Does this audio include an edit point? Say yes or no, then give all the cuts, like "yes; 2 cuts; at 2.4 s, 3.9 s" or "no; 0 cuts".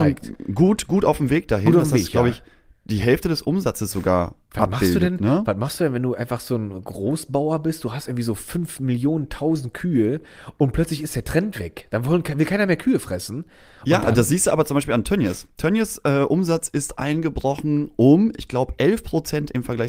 no; 0 cuts